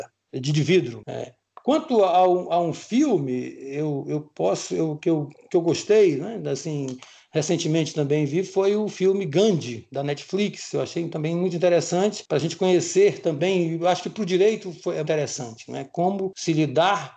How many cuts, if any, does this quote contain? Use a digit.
1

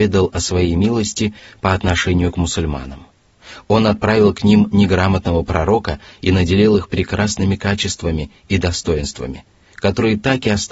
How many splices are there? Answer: 0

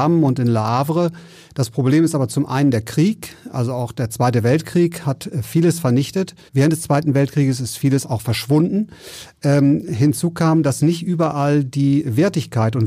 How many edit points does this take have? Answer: 2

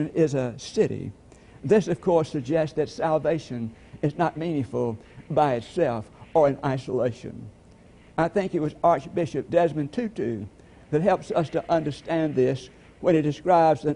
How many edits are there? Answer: 1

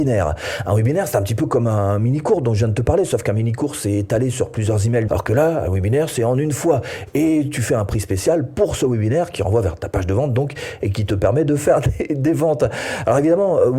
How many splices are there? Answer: 1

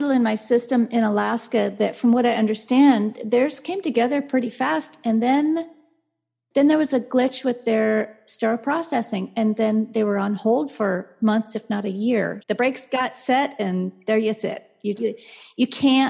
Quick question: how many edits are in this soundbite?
2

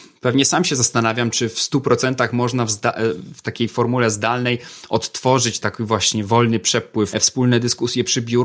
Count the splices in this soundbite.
2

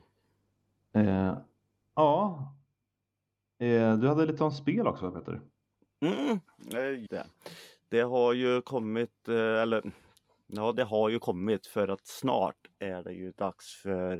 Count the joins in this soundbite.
1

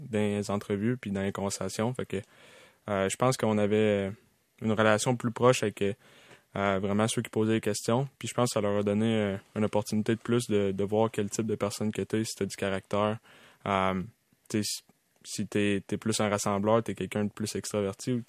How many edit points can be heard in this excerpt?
0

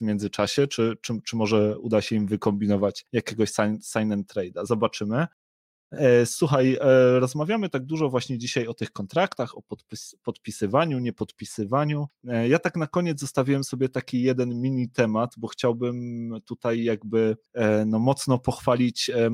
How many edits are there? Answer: 0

